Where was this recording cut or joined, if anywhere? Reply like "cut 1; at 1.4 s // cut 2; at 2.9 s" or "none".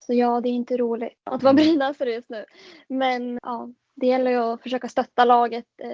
cut 1; at 3.4 s

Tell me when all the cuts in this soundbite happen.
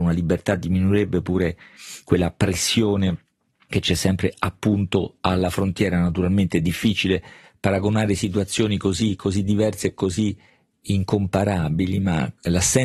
none

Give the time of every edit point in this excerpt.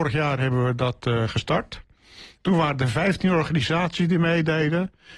none

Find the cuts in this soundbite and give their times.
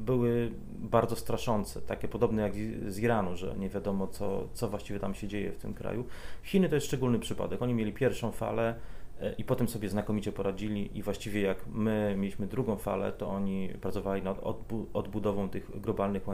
none

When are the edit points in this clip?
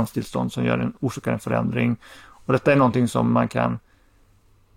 none

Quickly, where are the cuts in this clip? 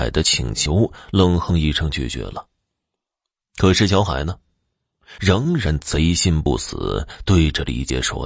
none

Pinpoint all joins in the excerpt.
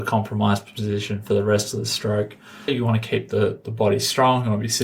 cut 1; at 2.7 s

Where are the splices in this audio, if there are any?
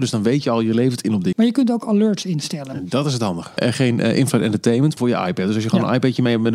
cut 1; at 1.3 s // cut 2; at 3.6 s // cut 3; at 5.0 s

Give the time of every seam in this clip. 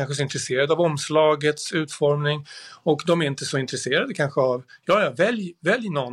none

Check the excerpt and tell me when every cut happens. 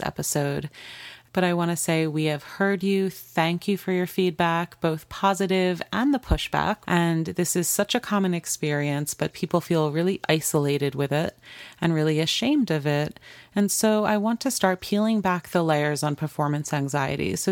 cut 1; at 6.8 s

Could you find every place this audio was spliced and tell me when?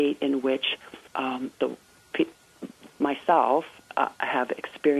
cut 1; at 1.1 s // cut 2; at 3.0 s

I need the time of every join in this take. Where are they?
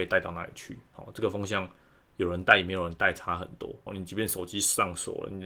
cut 1; at 3.9 s

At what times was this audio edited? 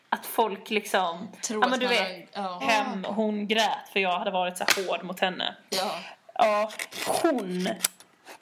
cut 1; at 2.6 s

